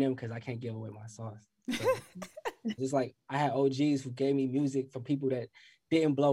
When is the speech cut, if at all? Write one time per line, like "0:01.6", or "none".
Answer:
0:02.8

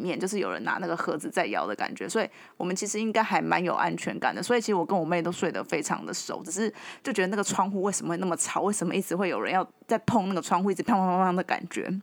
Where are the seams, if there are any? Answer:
none

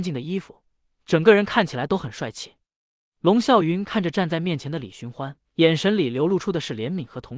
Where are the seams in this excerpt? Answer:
0:03.0
0:05.4

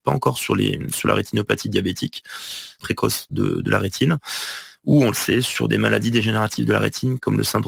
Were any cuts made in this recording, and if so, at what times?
0:02.8

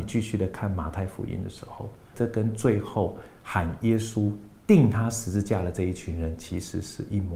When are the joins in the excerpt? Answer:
0:02.1

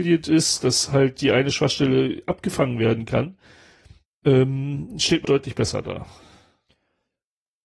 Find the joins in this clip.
0:05.2

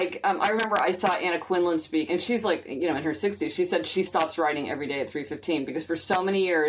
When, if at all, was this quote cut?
0:02.1
0:04.1

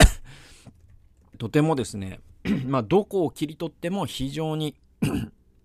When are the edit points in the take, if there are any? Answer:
0:01.3

